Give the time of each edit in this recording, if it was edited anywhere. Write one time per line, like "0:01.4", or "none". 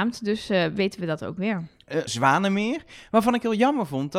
0:02.1